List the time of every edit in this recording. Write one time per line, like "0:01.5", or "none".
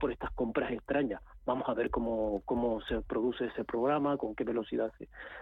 none